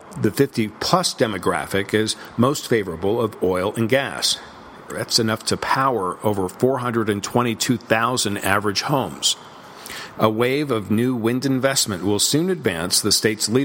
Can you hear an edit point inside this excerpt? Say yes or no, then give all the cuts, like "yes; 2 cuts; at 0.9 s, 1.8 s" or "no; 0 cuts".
yes; 2 cuts; at 4.9 s, 10.1 s